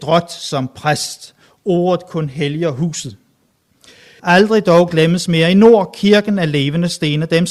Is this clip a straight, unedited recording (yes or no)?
no